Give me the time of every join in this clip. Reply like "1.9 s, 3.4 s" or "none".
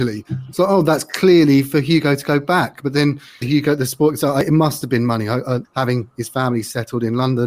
3.4 s, 5.6 s